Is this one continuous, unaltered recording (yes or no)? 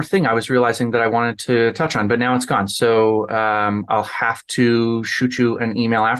yes